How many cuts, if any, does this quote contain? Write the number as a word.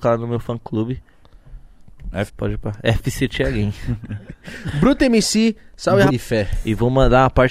two